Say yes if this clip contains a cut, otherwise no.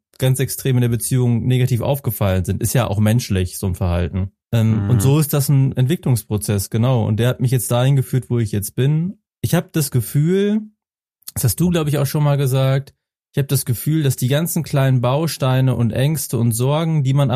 no